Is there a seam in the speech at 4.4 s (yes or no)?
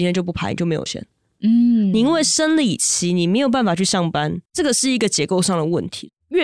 yes